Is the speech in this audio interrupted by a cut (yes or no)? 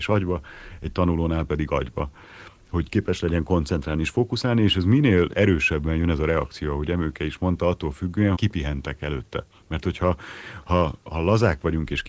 yes